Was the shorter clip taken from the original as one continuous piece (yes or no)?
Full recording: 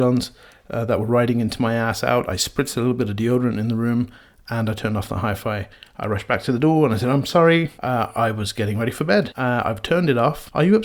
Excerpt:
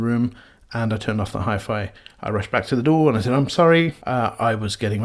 yes